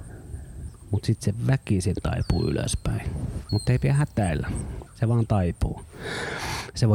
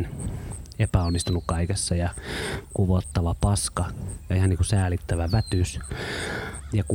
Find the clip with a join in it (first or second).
first